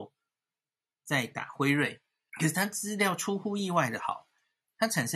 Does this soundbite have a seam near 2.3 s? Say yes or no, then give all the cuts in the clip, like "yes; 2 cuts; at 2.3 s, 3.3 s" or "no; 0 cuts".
yes; 1 cut; at 2.3 s